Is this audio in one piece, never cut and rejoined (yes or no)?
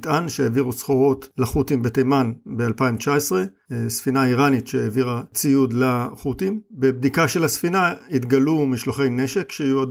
yes